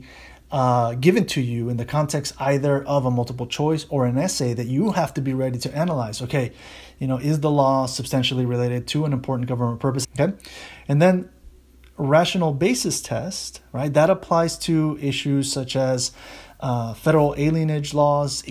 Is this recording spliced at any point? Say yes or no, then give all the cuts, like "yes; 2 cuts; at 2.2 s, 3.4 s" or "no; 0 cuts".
yes; 1 cut; at 10.0 s